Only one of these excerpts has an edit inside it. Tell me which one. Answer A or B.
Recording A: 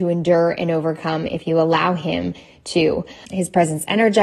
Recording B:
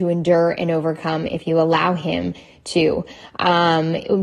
A